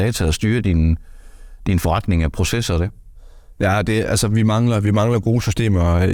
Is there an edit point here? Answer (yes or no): no